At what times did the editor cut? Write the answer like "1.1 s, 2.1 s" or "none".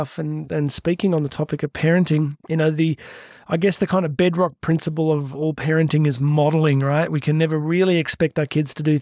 2.4 s